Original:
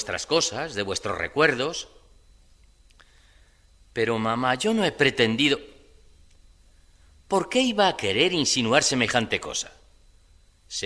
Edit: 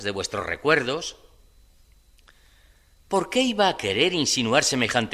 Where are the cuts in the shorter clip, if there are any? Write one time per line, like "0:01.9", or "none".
0:03.0